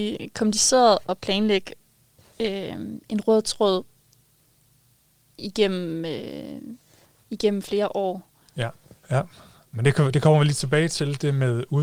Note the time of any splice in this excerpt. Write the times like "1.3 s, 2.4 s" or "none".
8.9 s